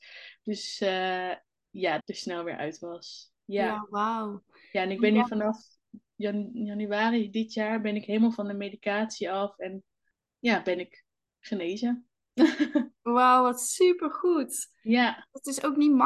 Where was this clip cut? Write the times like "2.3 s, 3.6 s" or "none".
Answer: 2.0 s

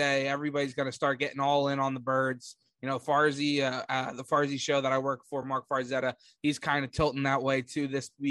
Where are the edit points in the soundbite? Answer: none

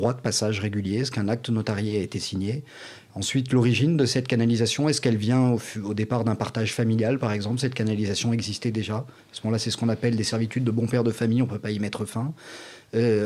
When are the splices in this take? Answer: none

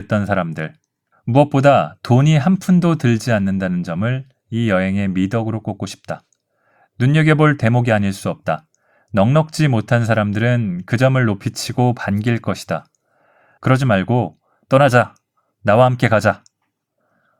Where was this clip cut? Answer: 1.1 s, 13.6 s

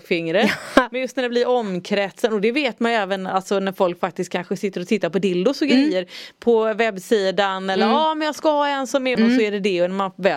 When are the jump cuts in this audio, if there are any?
9.2 s

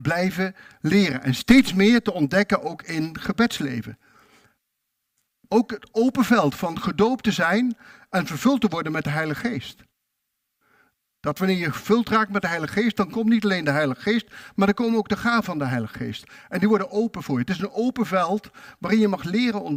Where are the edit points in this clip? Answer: none

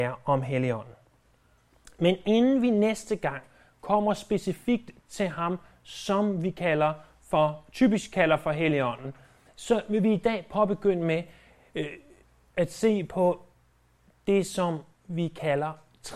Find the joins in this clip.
none

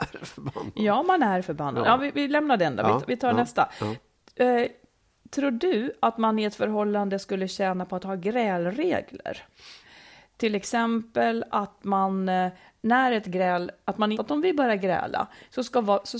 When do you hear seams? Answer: 14.1 s

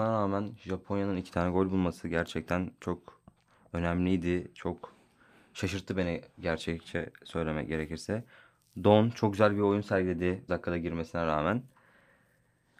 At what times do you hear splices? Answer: 10.5 s

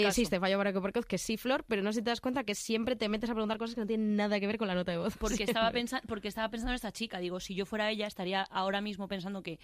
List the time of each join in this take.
none

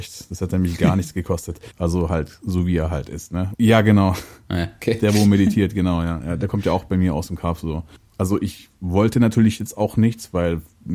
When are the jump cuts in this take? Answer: 1.7 s, 3.5 s, 8.0 s

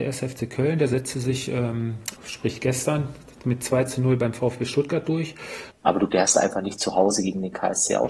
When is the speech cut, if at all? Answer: 2.2 s, 5.7 s

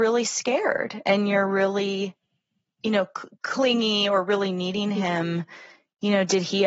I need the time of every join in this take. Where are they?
none

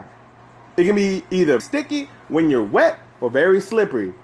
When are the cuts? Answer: 1.6 s

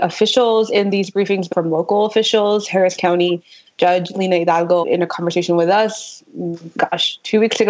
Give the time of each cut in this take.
1.5 s, 4.8 s

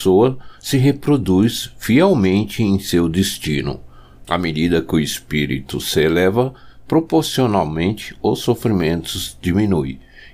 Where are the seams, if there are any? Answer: 4.2 s

